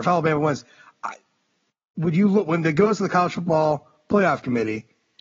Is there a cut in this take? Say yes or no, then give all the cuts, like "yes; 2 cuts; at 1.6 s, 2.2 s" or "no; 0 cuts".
no; 0 cuts